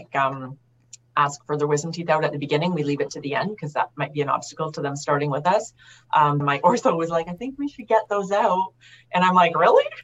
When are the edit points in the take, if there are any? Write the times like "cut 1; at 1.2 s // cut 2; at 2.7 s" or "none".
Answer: cut 1; at 6.4 s